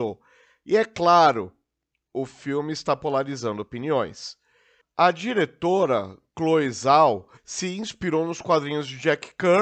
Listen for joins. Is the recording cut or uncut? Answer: cut